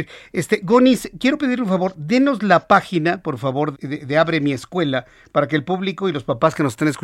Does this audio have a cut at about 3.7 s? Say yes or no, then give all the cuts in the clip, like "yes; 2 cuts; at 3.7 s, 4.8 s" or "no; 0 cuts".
yes; 1 cut; at 3.7 s